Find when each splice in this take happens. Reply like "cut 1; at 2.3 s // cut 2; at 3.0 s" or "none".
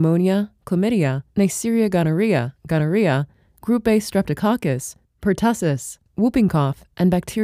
none